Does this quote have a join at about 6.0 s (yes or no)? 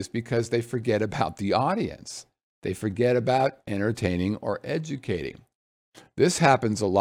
no